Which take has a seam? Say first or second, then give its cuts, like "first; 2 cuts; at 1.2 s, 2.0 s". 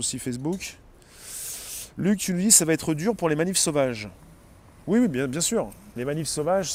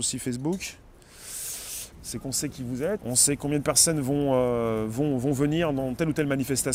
second; 2 cuts; at 1.9 s, 3.0 s